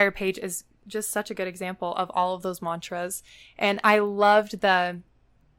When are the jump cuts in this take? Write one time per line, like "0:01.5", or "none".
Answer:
none